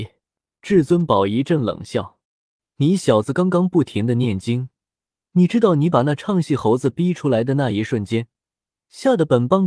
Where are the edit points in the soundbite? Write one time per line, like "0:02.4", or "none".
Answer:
0:02.2

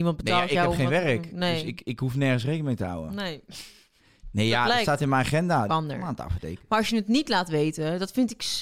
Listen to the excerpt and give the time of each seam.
0:05.7

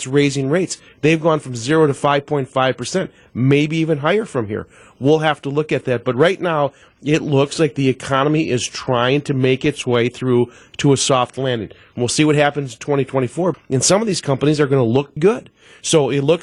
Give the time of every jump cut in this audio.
0:13.5
0:15.2

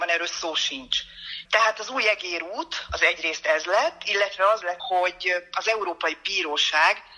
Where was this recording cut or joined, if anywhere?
0:01.4
0:04.8

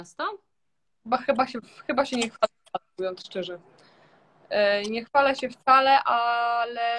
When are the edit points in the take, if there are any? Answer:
none

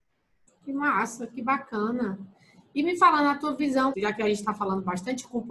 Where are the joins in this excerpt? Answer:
0:03.9

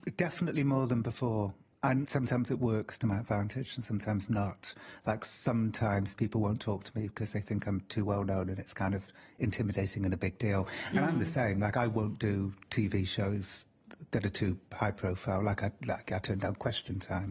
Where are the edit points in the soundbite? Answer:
none

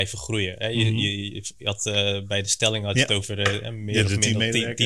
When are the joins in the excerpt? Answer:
none

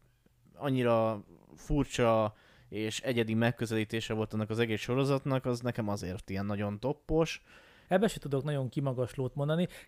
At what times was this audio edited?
0:07.9

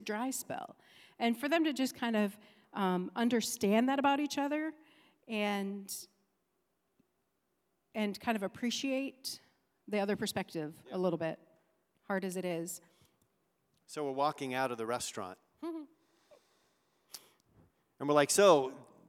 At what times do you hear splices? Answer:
none

